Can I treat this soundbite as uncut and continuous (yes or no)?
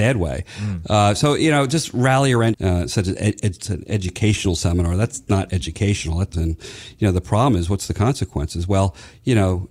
no